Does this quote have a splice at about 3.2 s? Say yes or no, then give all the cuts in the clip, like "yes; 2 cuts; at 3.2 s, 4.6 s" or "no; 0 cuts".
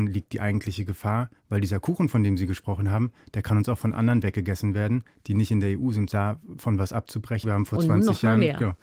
no; 2 cuts; at 6.1 s, 7.4 s